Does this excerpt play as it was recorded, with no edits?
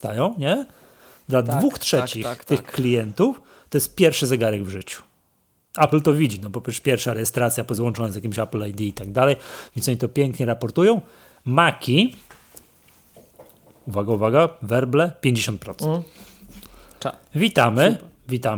yes; 0 cuts

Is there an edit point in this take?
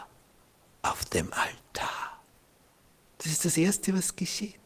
no; 0 cuts

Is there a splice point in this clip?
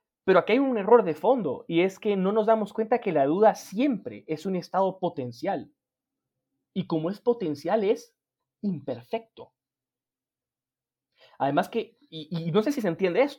no; 0 cuts

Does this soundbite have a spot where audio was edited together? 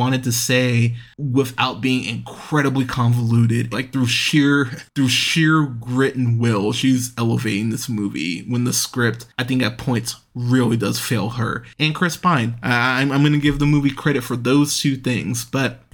yes; 1 cut; at 3.7 s

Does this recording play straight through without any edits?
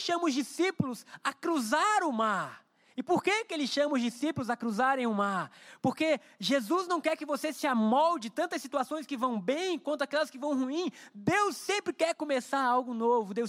yes; 0 cuts

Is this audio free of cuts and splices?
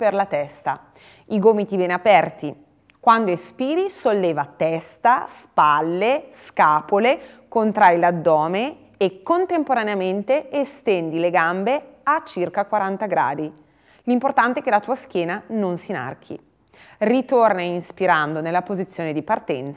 yes; 0 cuts

